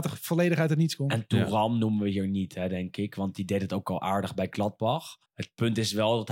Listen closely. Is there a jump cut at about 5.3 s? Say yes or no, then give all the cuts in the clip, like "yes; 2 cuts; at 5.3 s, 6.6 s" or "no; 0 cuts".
yes; 1 cut; at 5.3 s